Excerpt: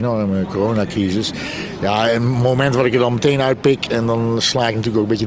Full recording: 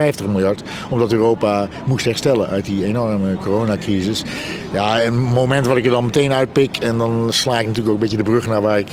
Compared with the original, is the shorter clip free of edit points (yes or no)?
yes